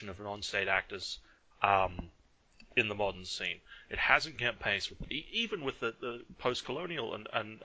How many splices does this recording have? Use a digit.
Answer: 0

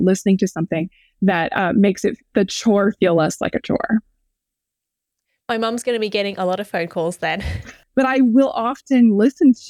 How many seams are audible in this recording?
1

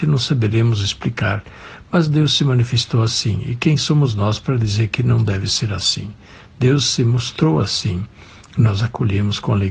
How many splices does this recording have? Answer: 0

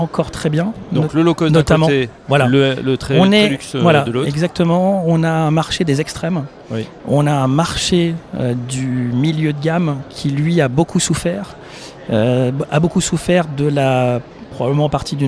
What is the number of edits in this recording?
1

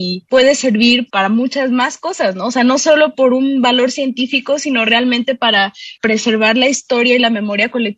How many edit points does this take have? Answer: 1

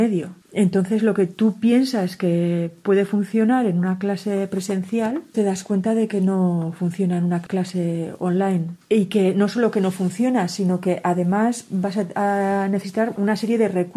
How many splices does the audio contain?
1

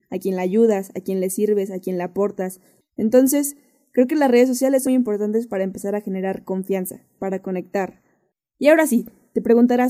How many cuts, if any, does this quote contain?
3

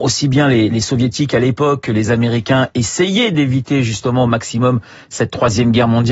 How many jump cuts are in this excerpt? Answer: 0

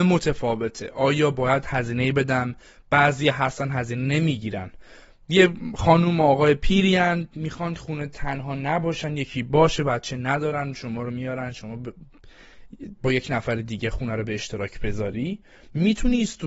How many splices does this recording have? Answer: 1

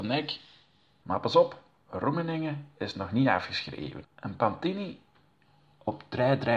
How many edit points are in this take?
2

